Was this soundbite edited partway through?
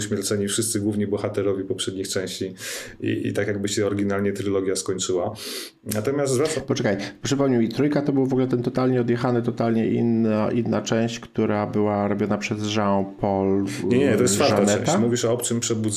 no; 0 cuts

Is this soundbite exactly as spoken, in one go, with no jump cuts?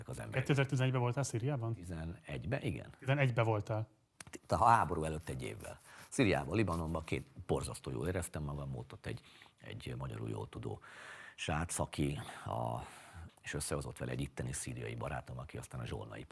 no; 1 cut; at 13.3 s

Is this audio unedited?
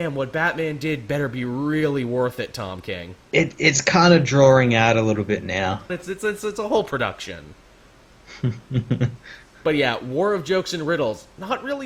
no; 2 cuts; at 3.2 s, 5.9 s

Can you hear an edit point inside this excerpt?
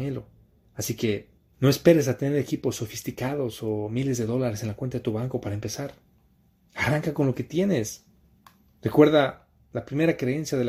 yes; 1 cut; at 1.5 s

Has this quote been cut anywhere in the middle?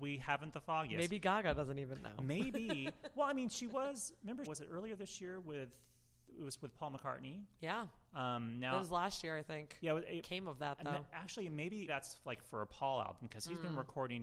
yes; 3 cuts; at 4.5 s, 10.2 s, 11.9 s

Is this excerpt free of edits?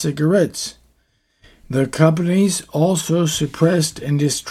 no; 1 cut; at 1.6 s

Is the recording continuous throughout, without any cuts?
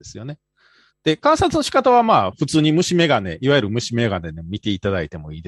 no; 1 cut; at 0.9 s

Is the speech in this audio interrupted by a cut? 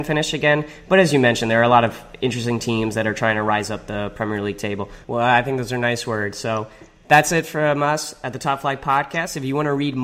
yes; 1 cut; at 5.0 s

